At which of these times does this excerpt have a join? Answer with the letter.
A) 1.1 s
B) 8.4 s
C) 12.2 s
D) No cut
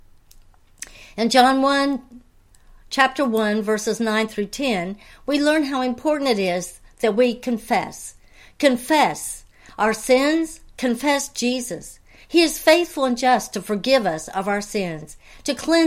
D